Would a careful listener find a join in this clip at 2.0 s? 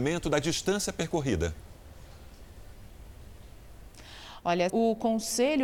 no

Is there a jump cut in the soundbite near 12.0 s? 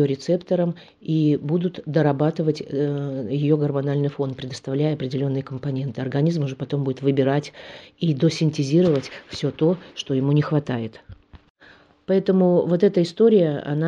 yes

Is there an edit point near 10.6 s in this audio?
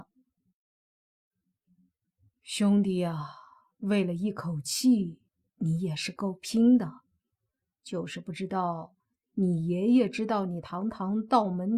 no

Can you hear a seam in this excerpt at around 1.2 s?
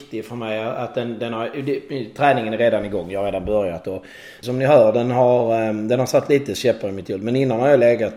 no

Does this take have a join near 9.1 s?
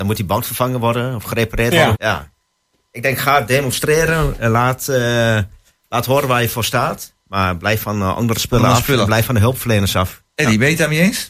no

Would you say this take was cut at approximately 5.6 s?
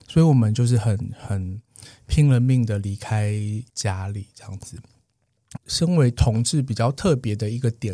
yes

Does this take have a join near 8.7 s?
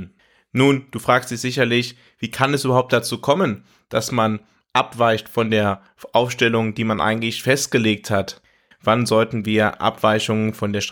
yes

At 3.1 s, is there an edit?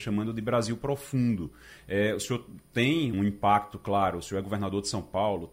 yes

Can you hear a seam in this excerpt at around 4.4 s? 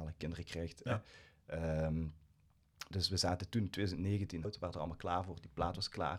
yes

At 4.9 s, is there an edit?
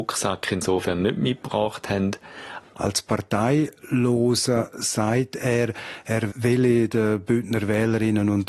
no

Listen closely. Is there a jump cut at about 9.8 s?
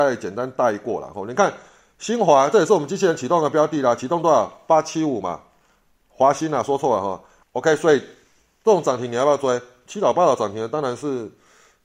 no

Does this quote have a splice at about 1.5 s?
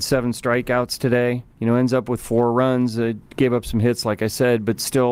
yes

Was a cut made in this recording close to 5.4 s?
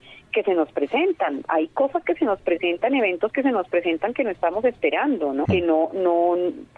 yes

